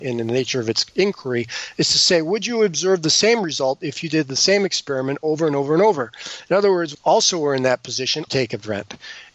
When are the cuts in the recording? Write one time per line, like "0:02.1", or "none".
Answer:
0:06.9
0:08.3

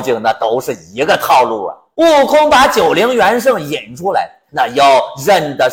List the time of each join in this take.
0:01.9
0:04.5

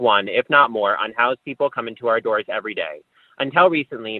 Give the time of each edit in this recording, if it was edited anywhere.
none

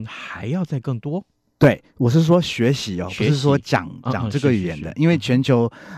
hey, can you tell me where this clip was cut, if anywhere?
none

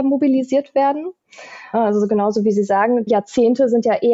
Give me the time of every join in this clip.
0:01.7
0:03.1

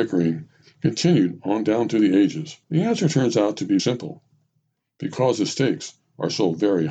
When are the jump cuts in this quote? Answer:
0:02.6
0:03.8

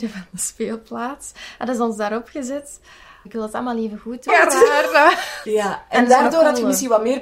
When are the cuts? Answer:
0:03.3
0:04.3
0:05.4

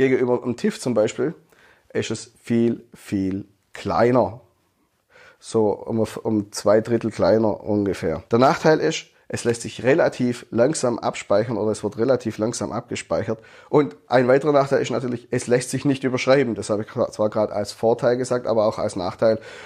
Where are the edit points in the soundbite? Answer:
0:08.3

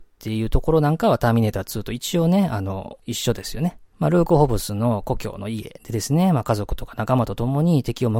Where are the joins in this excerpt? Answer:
0:03.9

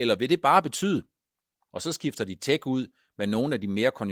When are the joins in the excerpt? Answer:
0:01.7

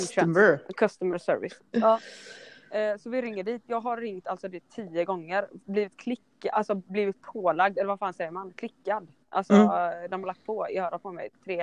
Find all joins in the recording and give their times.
0:01.6

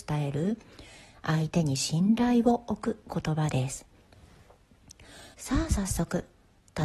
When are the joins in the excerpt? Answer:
0:05.3

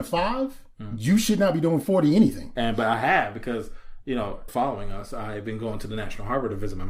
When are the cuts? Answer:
0:02.5
0:04.5

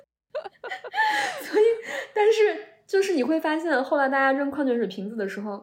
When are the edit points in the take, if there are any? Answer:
none

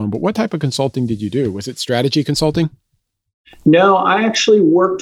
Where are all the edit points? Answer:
none

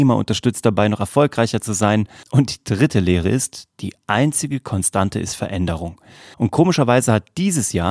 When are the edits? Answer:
0:02.2
0:06.3

